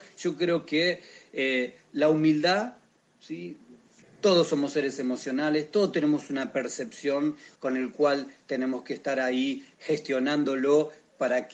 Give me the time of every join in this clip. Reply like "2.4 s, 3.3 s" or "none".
4.0 s, 7.6 s